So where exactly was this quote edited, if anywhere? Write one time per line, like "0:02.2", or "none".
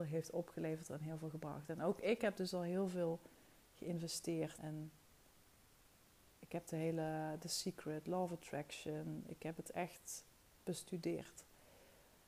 0:04.6